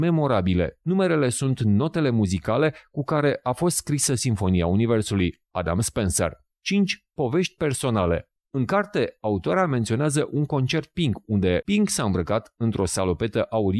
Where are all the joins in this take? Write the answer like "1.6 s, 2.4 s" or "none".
8.4 s, 11.6 s

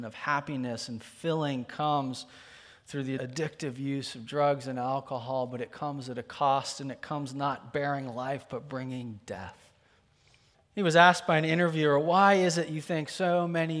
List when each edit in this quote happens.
3.2 s, 10.5 s

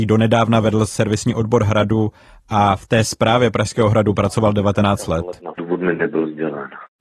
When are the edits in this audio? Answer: 5.5 s

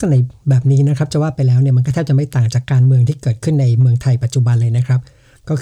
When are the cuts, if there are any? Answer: 2.6 s

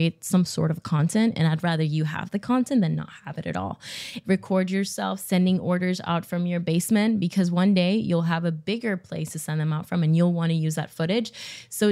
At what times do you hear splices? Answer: 4.2 s

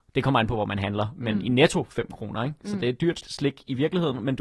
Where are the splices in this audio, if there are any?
3.2 s

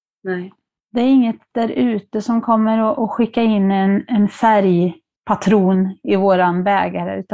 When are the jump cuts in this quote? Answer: none

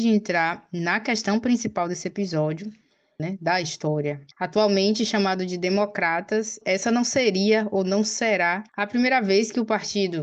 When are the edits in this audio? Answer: 3.2 s, 4.3 s, 8.7 s

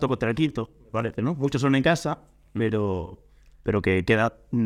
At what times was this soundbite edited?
none

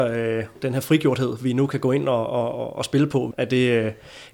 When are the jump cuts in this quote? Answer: 3.3 s

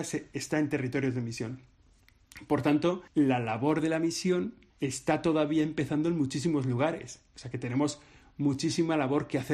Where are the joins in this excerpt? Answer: 3.1 s, 4.7 s

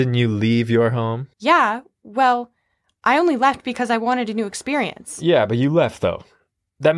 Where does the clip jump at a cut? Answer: 1.3 s

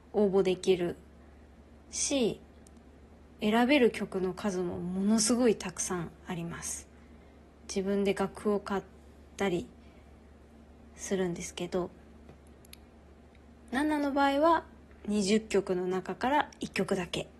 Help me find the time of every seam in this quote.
3.1 s

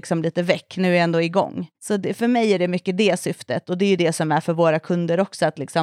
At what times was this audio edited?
1.7 s

